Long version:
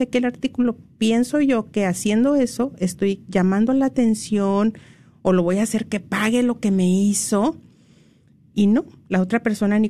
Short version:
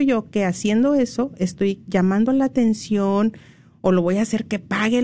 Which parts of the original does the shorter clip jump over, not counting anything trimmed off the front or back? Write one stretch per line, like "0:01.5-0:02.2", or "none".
none